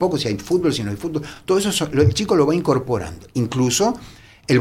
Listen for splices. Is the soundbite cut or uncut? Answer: uncut